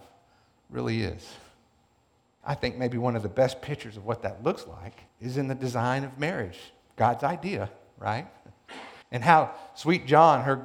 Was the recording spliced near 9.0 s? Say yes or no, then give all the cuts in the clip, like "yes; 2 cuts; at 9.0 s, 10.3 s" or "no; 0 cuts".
yes; 3 cuts; at 2.4 s, 5.1 s, 9.0 s